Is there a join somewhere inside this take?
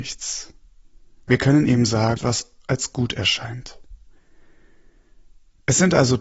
yes; 1 cut; at 2.2 s

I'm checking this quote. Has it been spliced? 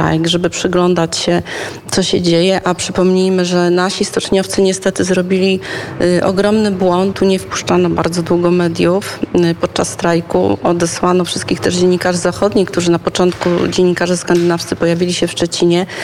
yes; 1 cut; at 7.1 s

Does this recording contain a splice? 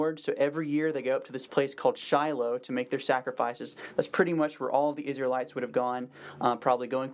no; 0 cuts

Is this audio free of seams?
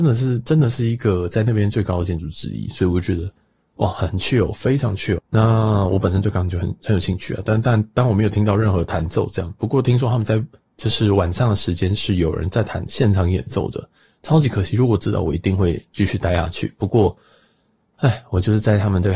no; 1 cut; at 5.2 s

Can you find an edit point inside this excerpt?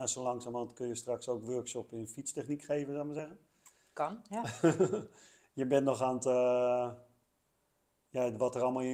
no; 0 cuts

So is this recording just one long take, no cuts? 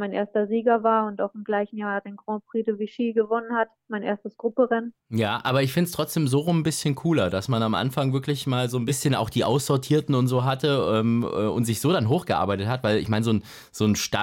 no; 1 cut; at 5.0 s

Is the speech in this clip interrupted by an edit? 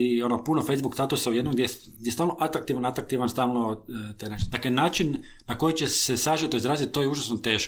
yes; 1 cut; at 4.5 s

